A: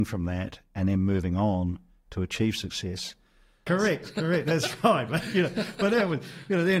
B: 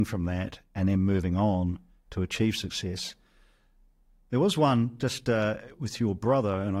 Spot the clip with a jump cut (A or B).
A